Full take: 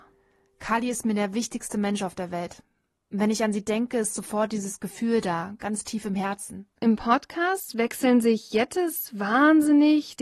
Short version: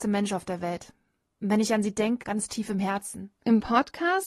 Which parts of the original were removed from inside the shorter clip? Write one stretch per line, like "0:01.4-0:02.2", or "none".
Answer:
0:03.9-0:05.6

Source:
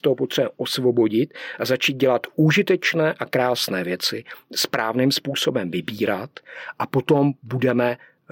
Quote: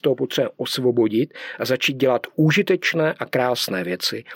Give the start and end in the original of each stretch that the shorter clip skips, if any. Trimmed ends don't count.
none

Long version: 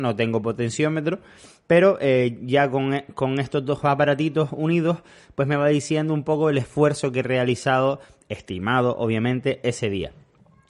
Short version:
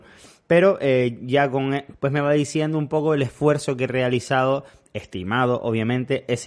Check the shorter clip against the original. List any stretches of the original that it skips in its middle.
0:03.1-0:05.3

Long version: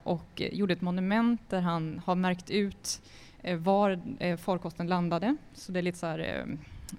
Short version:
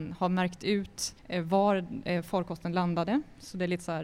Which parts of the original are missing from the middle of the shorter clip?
0:03.1-0:03.3

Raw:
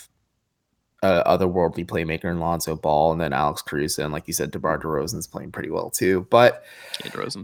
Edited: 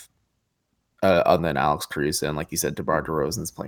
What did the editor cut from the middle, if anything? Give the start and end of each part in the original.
0:01.4-0:03.1

